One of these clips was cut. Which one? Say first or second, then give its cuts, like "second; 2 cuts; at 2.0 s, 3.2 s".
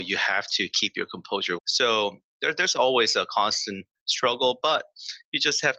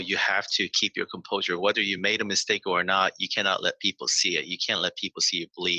first; 1 cut; at 1.6 s